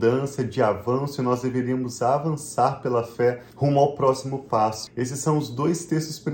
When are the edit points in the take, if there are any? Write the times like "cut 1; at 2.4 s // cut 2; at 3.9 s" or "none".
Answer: cut 1; at 3.5 s // cut 2; at 4.9 s